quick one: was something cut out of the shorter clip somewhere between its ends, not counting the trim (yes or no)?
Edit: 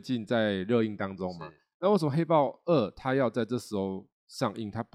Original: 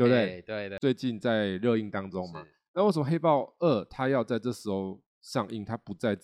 no